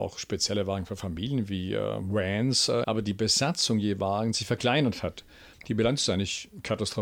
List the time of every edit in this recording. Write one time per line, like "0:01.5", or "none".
0:02.8
0:05.5

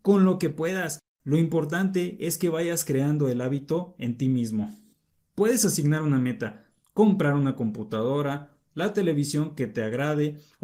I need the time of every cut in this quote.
none

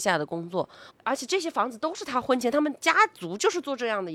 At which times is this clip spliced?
0:00.9

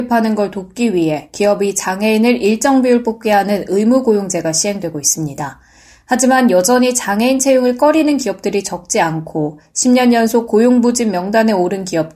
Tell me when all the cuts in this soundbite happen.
none

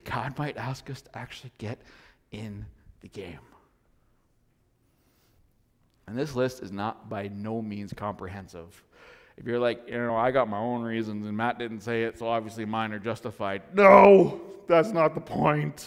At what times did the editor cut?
none

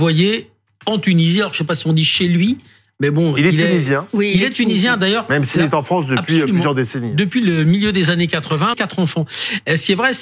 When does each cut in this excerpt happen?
0:08.7

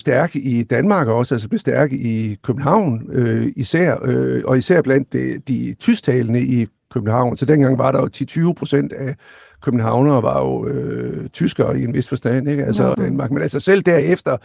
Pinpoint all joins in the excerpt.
0:12.9

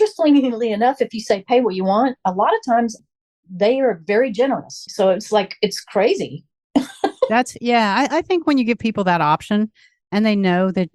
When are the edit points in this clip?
0:04.9

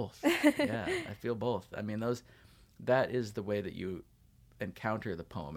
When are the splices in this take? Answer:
none

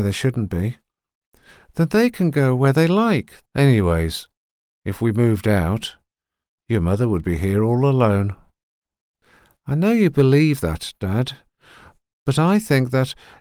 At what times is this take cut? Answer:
0:03.5

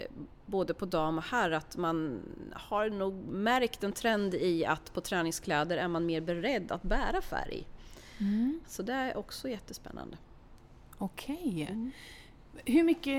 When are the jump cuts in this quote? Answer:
0:08.6

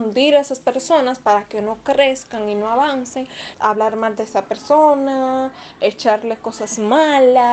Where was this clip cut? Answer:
0:03.5

